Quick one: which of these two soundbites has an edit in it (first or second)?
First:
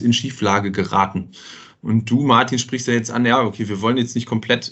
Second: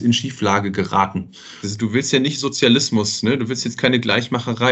second